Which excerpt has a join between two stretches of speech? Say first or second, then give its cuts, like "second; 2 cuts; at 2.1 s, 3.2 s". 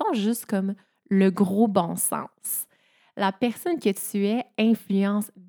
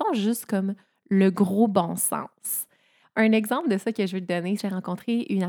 second; 2 cuts; at 3.0 s, 4.6 s